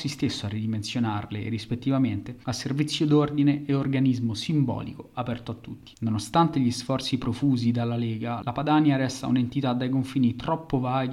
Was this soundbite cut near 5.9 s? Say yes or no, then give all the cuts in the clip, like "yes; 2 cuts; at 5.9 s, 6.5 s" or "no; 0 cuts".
yes; 1 cut; at 5.9 s